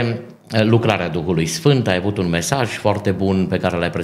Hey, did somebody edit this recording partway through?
no; 0 cuts

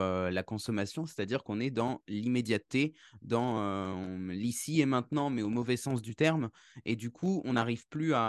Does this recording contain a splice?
no; 0 cuts

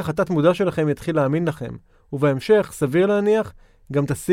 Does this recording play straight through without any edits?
yes; 0 cuts

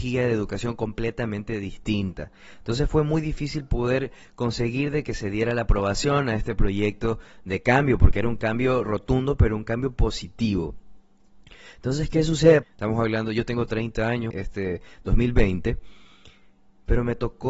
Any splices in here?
yes; 2 cuts; at 12.6 s, 14.3 s

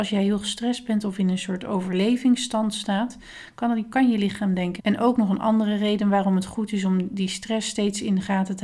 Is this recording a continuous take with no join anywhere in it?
no; 1 cut; at 4.8 s

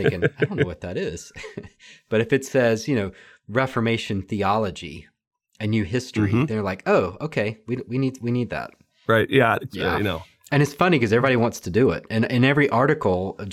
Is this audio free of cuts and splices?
no; 1 cut; at 9.7 s

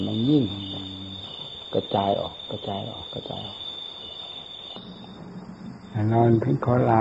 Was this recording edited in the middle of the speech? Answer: no; 0 cuts

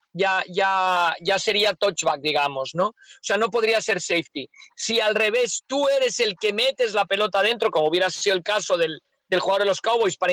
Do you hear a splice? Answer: no; 0 cuts

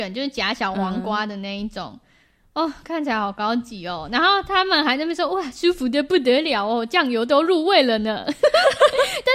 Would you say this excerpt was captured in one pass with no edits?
yes; 0 cuts

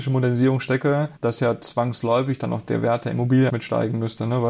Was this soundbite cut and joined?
yes; 2 cuts; at 1.2 s, 3.5 s

